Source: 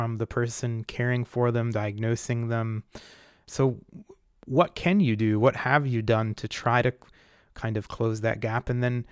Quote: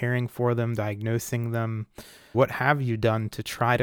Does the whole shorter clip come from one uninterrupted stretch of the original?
no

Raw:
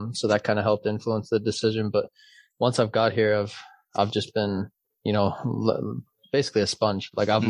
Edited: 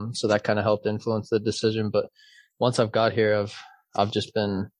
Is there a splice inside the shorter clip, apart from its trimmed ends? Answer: no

